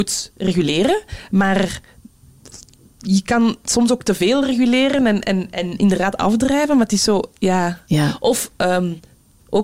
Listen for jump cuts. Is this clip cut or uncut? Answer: uncut